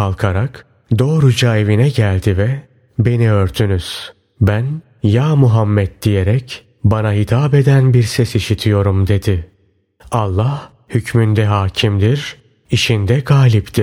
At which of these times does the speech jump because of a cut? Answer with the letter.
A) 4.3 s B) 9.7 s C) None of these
A